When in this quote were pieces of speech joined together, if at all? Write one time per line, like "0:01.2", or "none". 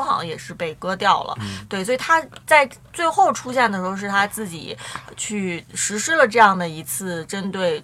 none